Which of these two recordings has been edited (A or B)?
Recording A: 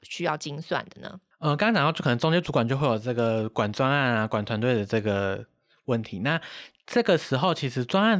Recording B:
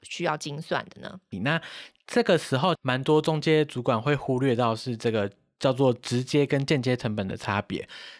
B